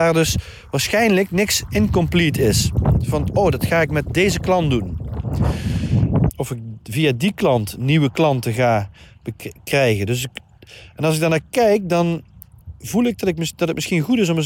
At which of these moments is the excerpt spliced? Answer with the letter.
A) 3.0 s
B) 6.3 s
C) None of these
B